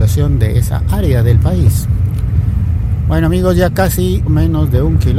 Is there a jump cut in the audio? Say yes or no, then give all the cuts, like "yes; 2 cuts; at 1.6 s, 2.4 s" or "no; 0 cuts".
yes; 1 cut; at 4.3 s